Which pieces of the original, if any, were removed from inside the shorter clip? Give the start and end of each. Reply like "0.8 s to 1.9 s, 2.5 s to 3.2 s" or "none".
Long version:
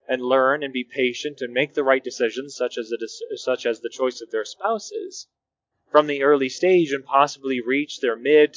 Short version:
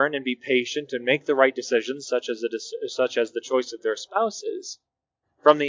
none

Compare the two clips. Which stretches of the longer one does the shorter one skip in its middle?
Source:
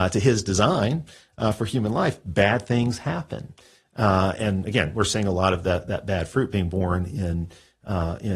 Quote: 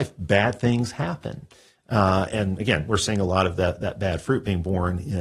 none

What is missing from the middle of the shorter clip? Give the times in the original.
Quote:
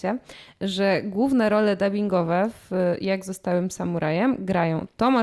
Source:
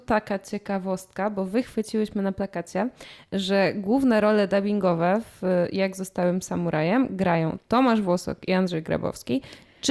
none

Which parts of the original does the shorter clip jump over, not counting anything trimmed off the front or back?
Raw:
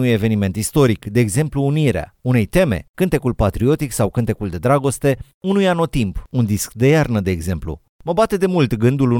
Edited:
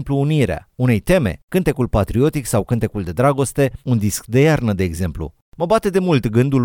5.3 s to 6.3 s

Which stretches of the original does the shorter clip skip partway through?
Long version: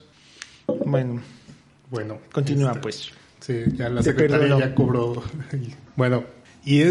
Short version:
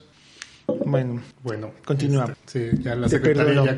1.3 s to 1.8 s, 2.8 s to 3.3 s

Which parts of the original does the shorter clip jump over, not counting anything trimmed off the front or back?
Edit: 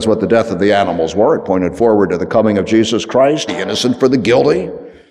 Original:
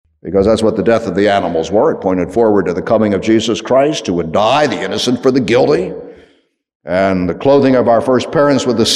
4.0 s to 4.7 s

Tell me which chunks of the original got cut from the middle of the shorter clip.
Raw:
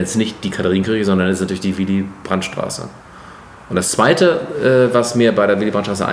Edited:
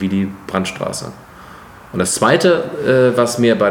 none

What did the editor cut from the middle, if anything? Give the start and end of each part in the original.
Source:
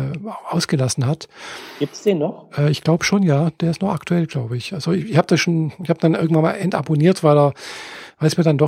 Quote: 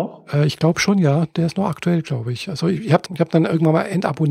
5.3 s to 5.8 s

